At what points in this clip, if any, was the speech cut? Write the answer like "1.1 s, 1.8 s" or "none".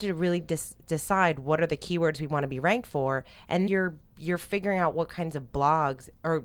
3.7 s

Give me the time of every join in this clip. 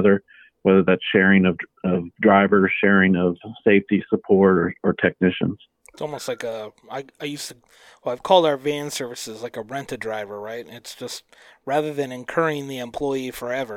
none

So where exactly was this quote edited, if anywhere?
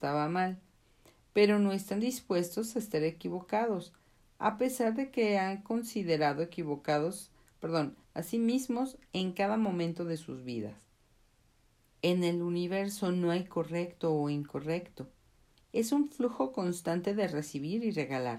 8.0 s, 11.9 s

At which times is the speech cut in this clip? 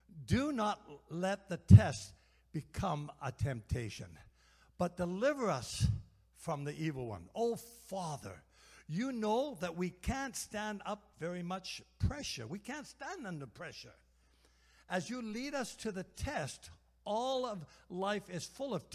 none

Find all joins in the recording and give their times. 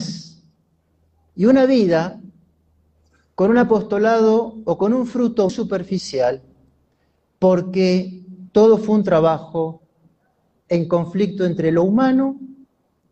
5.5 s

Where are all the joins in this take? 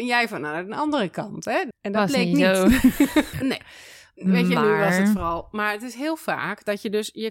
1.7 s, 3.3 s

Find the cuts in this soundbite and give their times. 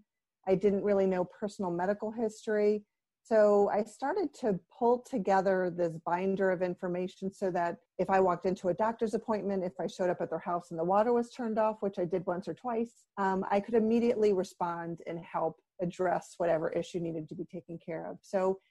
7.9 s, 13.1 s, 15.7 s

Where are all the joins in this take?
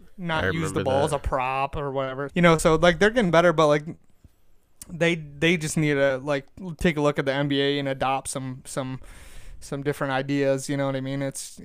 2.3 s

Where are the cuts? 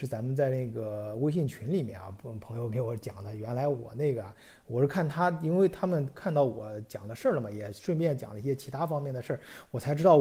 none

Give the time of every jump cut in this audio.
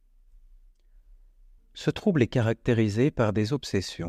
1.6 s

